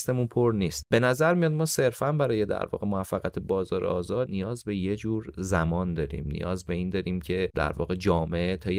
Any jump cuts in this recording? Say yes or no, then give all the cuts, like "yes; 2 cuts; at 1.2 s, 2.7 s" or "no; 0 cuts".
no; 0 cuts